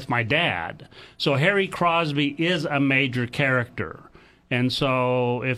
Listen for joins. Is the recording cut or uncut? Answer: uncut